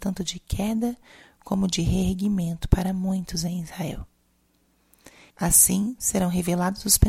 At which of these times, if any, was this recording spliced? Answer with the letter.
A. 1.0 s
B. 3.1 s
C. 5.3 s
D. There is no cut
C